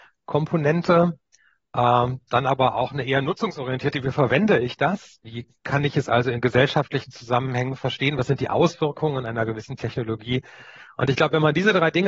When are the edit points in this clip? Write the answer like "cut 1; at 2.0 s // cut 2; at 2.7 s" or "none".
cut 1; at 5.2 s